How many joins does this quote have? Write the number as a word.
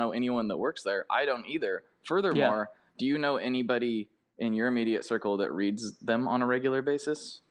zero